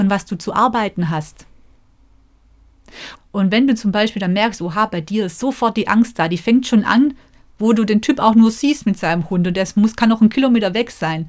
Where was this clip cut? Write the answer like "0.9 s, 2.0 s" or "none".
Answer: 3.2 s